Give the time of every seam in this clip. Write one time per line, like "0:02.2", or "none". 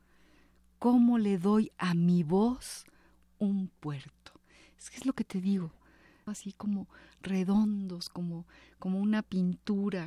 0:06.3